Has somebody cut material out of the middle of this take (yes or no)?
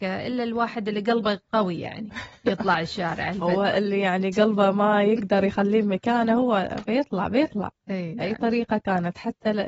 no